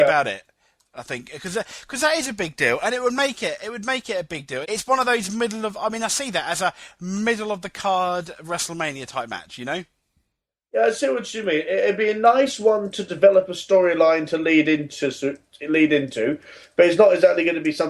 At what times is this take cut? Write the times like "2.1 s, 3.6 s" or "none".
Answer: 4.6 s